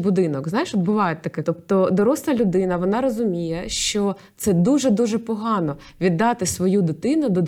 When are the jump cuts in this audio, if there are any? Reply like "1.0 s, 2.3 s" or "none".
1.4 s